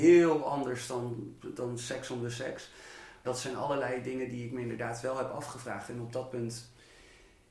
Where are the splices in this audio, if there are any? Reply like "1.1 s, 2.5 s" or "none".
3.2 s